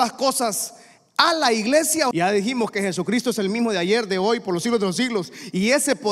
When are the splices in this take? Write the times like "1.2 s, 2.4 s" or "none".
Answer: 2.1 s